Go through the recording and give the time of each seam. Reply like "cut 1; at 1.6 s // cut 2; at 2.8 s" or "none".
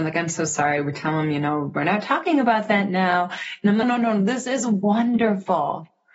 cut 1; at 3.8 s